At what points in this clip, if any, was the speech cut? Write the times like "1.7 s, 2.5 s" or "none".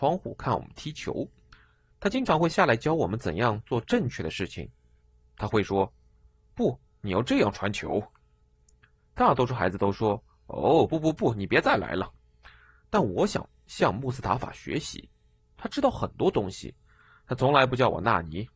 none